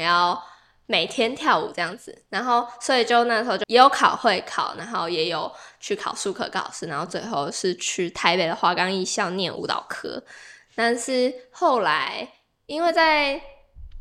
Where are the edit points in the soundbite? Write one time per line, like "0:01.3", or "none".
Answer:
0:03.6